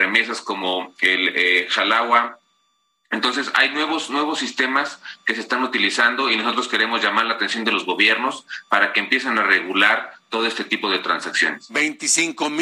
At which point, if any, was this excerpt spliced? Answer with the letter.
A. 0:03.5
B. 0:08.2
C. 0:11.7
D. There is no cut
D